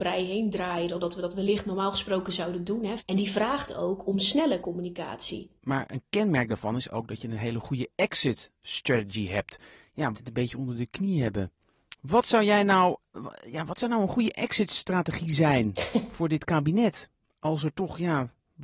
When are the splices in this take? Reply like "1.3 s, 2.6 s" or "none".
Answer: 3.0 s, 5.6 s, 10.1 s